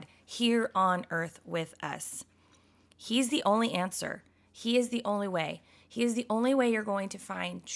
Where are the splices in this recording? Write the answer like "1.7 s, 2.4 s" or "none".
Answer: none